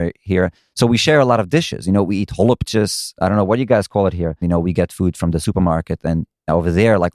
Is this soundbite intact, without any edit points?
no; 1 cut; at 4.4 s

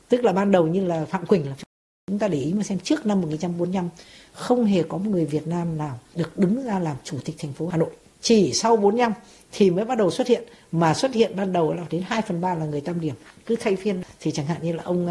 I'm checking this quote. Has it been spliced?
no; 0 cuts

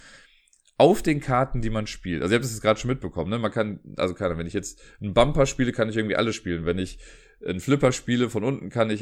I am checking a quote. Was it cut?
no; 0 cuts

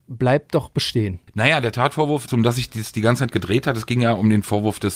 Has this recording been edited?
yes; 2 cuts; at 1.3 s, 2.3 s

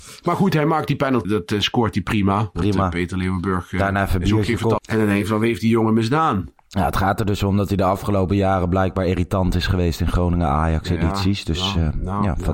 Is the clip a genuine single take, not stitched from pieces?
no; 2 cuts; at 1.2 s, 4.8 s

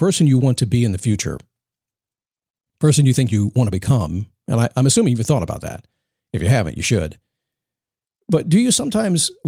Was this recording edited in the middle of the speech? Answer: no; 0 cuts

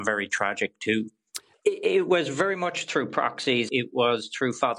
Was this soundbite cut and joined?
yes; 2 cuts; at 1.5 s, 3.7 s

